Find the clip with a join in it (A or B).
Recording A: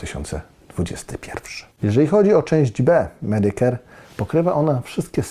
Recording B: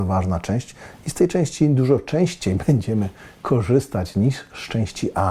A